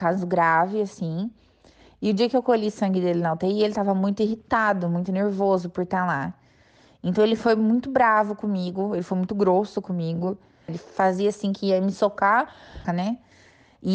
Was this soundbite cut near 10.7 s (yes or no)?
yes